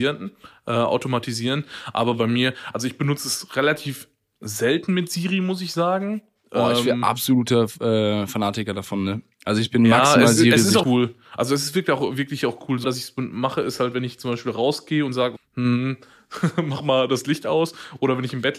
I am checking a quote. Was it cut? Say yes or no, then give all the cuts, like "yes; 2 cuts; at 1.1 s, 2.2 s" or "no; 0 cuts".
yes; 3 cuts; at 10.8 s, 12.8 s, 15.4 s